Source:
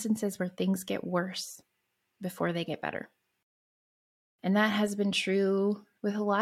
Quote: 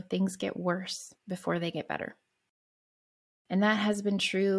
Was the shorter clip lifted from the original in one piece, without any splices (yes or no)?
no